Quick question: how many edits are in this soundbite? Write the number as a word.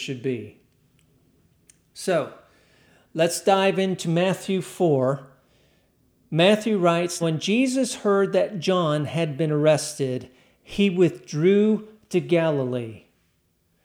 one